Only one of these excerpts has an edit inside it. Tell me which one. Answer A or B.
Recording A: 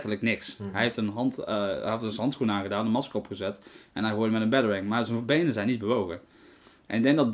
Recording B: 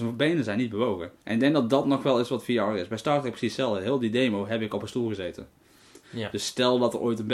B